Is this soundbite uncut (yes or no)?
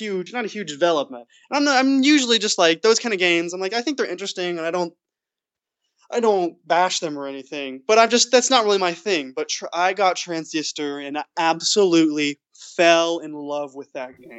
yes